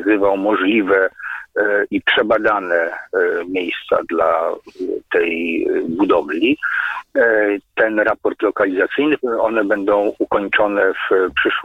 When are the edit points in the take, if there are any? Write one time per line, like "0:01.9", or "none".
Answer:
0:09.2